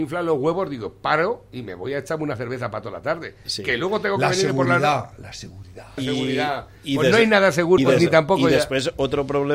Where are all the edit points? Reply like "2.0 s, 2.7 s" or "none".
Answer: 6.0 s, 7.8 s

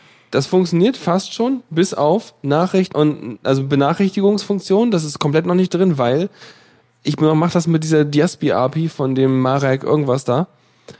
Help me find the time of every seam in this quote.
2.9 s

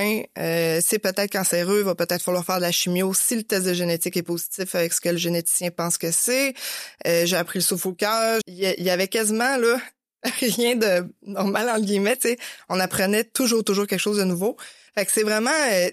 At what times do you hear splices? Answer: 8.4 s, 14.9 s

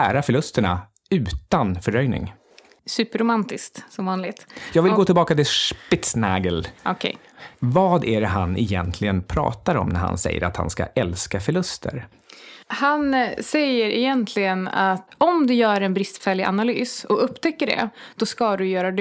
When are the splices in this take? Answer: none

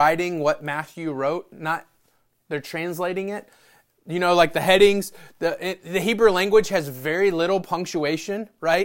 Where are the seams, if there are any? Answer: none

